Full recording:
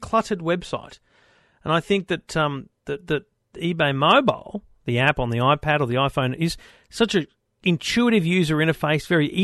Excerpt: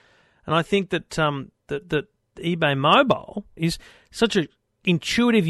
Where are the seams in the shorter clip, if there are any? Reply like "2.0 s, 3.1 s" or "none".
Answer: 3.6 s